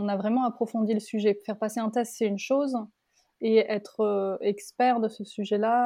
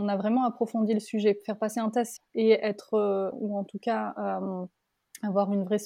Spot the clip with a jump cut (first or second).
second